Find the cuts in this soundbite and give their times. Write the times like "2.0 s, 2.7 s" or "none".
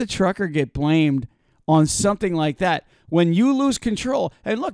none